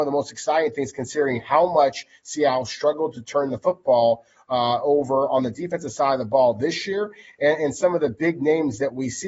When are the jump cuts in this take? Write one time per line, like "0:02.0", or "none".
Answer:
none